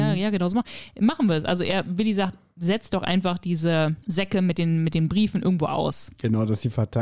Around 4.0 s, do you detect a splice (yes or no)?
yes